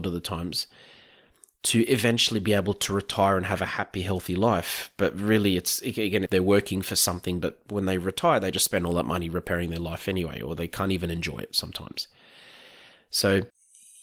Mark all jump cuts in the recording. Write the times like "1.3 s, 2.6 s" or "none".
6.3 s